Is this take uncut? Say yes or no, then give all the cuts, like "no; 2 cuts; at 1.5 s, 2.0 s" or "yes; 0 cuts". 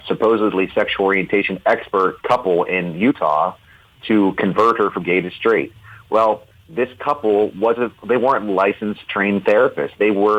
yes; 0 cuts